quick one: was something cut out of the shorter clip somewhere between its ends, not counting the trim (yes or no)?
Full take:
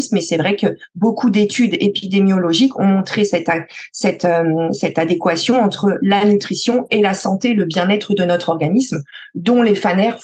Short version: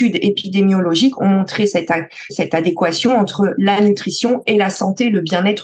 yes